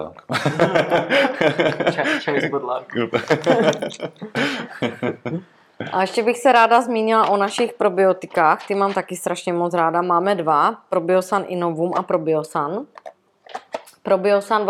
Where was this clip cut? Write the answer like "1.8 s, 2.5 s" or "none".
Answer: none